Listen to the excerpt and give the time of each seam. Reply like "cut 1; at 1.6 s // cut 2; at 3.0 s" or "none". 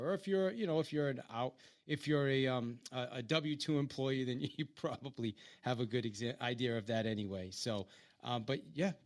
none